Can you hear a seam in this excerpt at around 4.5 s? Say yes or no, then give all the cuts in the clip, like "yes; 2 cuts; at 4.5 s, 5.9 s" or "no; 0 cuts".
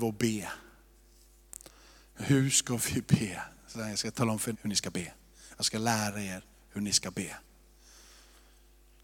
yes; 1 cut; at 4.5 s